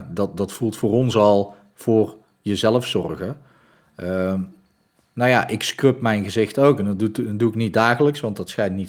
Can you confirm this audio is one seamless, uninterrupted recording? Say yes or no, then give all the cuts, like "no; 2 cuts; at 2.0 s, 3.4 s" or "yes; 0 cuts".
yes; 0 cuts